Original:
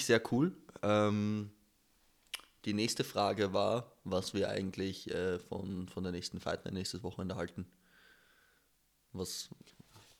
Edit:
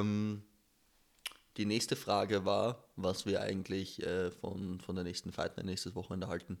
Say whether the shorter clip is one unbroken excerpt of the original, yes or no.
yes